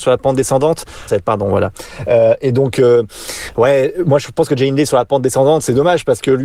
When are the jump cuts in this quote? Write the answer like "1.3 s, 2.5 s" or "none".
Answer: 1.1 s